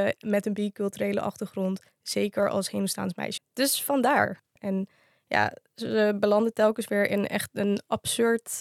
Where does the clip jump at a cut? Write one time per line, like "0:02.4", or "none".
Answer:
0:03.4
0:04.6